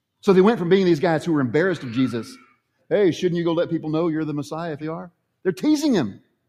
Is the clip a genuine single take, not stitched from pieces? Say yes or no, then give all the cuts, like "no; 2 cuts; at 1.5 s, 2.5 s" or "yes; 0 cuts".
no; 2 cuts; at 2.8 s, 4.8 s